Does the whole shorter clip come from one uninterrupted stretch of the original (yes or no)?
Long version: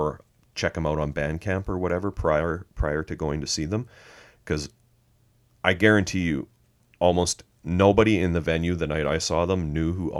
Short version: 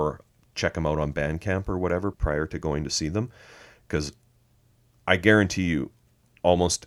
no